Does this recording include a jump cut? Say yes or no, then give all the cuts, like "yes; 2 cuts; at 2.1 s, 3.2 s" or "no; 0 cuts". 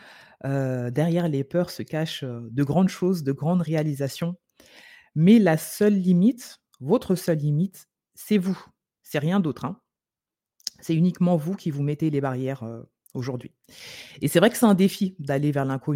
no; 0 cuts